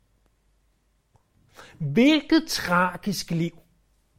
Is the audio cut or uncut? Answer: uncut